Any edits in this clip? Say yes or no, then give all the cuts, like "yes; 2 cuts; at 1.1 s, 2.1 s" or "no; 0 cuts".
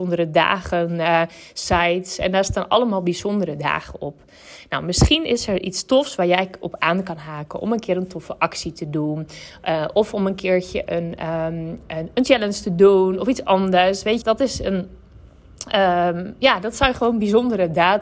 yes; 1 cut; at 14.2 s